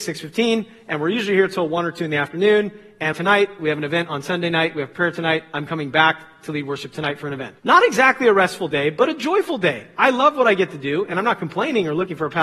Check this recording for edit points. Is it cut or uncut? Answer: cut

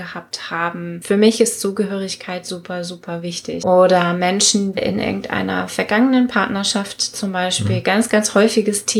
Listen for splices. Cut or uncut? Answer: cut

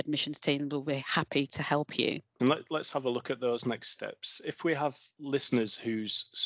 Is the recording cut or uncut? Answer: cut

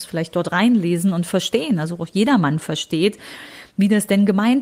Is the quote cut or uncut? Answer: uncut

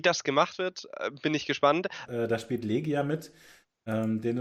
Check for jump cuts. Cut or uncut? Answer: cut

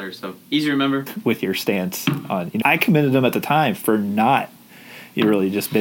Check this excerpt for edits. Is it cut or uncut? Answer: cut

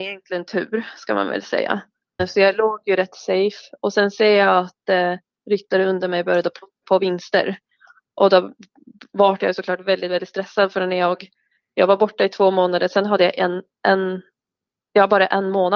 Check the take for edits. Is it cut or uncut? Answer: cut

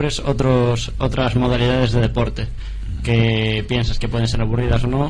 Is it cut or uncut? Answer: uncut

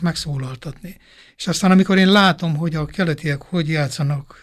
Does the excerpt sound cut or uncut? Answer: uncut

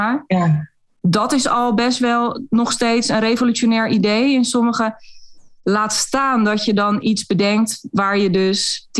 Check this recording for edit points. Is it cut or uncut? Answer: uncut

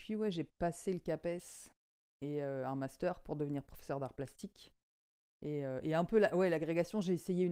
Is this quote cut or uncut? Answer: uncut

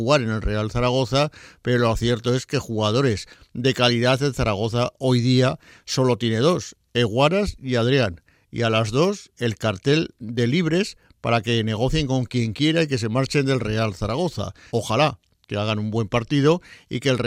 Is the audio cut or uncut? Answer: cut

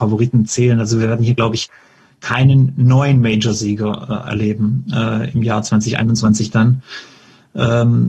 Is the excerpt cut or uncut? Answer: uncut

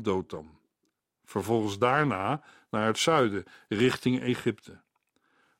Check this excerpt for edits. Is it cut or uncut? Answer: uncut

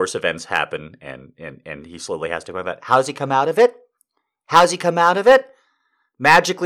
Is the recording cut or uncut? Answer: uncut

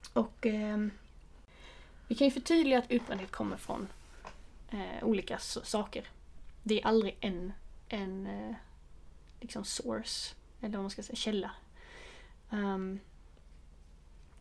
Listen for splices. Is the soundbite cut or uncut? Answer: uncut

